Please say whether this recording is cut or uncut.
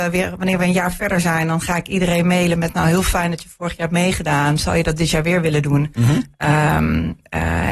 uncut